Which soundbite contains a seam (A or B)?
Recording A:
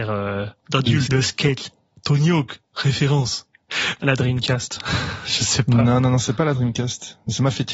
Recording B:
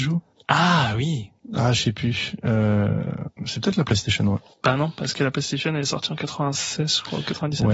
A